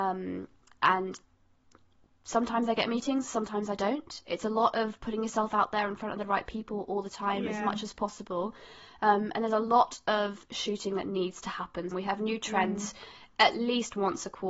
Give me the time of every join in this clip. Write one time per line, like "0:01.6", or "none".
0:11.9

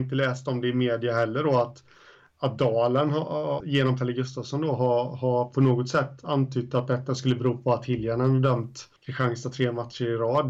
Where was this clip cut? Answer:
0:03.6
0:09.0

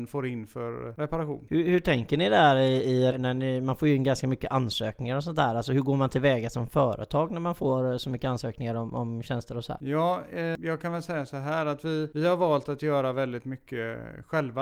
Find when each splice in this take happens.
0:03.1

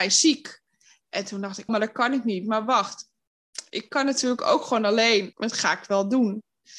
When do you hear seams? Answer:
0:01.7
0:05.3

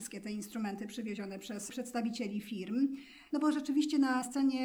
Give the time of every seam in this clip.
0:03.3

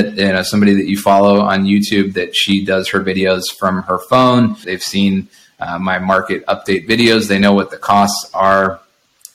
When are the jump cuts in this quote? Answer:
0:04.6

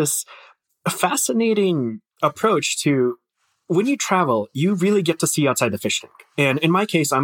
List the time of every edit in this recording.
none

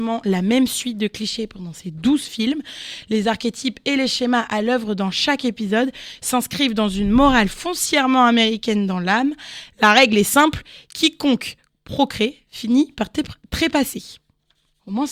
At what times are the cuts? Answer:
none

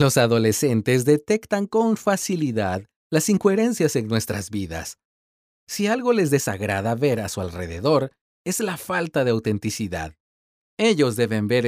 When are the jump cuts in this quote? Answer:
0:10.6

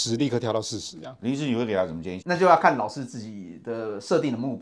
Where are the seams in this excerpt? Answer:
0:02.2

